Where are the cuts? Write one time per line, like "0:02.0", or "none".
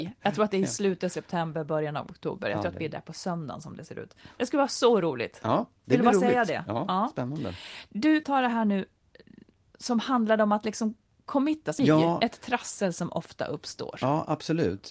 0:08.2
0:11.8

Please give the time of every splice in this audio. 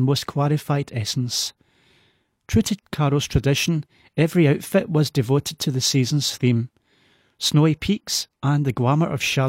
0:08.3

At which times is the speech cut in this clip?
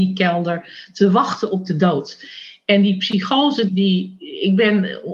0:03.7

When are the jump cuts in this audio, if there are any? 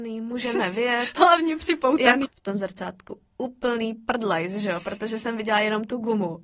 0:02.2

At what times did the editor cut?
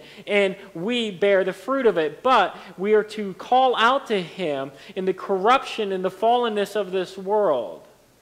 none

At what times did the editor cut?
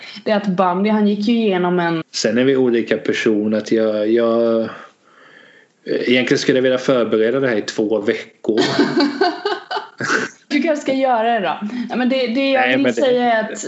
0:02.0
0:10.5

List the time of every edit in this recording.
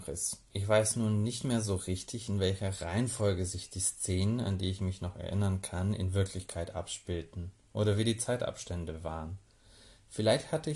none

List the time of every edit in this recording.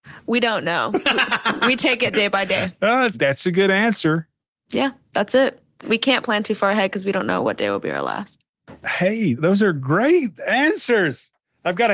0:03.1

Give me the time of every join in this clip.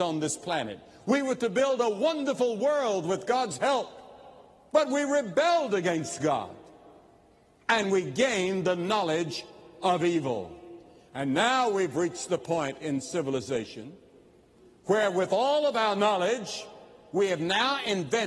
none

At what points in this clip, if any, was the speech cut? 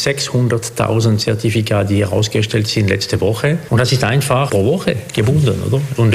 0:04.5

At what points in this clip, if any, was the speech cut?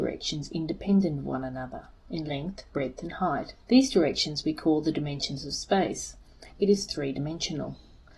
0:03.6
0:06.5

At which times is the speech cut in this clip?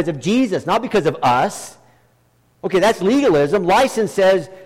0:02.6

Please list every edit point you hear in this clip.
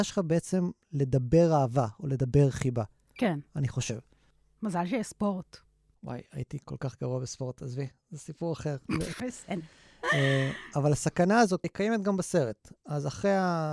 0:09.2
0:11.6

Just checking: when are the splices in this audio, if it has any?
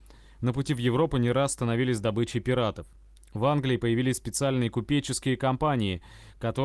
none

